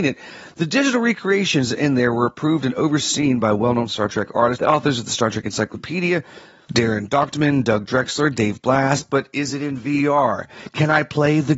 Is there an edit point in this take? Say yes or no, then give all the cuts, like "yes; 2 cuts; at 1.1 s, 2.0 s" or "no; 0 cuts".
yes; 1 cut; at 4.6 s